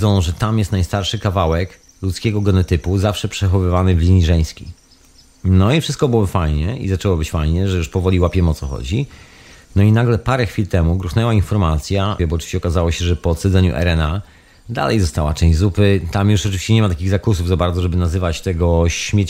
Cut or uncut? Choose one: cut